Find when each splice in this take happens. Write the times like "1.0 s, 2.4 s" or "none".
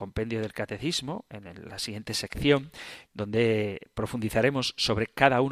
3.0 s